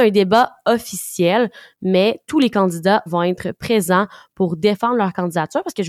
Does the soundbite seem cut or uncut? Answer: cut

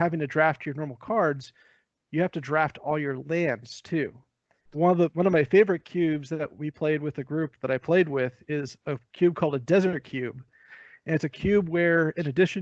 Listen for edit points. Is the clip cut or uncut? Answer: cut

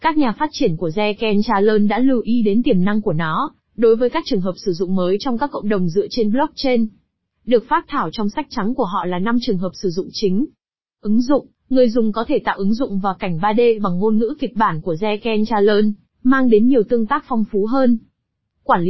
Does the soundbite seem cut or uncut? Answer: uncut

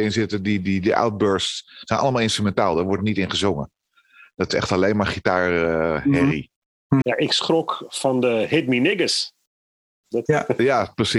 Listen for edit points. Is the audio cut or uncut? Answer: cut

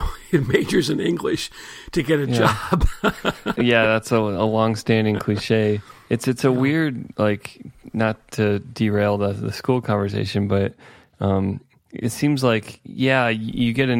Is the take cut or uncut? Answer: cut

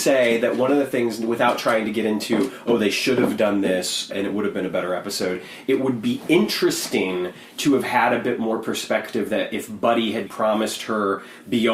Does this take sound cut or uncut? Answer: cut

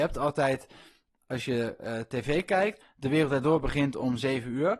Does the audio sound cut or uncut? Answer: uncut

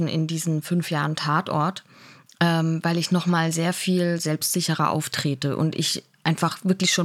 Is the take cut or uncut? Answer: uncut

